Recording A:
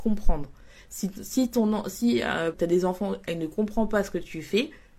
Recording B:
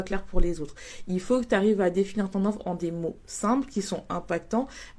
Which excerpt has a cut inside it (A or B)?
A